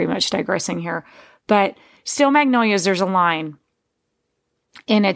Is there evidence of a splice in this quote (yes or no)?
no